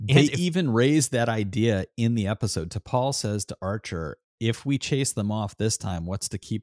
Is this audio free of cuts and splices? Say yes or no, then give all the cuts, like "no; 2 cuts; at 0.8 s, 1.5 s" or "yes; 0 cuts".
yes; 0 cuts